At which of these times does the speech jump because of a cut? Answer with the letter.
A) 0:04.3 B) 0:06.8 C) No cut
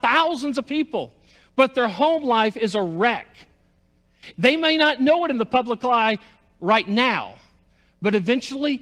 A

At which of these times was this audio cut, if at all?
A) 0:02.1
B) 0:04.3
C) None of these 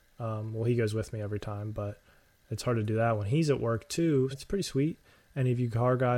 B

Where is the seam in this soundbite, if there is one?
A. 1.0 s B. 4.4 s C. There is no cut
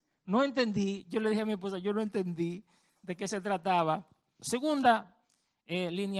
B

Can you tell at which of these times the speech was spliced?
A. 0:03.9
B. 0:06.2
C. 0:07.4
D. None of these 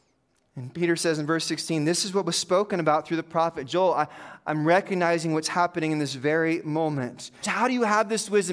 C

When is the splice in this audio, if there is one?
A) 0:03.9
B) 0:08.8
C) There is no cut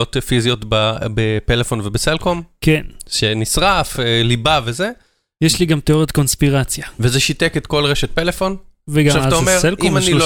C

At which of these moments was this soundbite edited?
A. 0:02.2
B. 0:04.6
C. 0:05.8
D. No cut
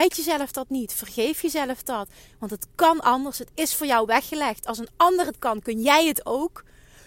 A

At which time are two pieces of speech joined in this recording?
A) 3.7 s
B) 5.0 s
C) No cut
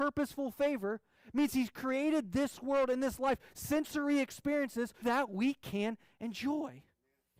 B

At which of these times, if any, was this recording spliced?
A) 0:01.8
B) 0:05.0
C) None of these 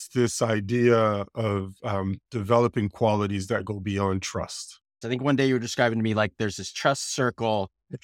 B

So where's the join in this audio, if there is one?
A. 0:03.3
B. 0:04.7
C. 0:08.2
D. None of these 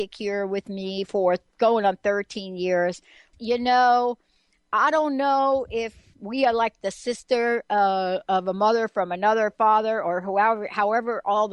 A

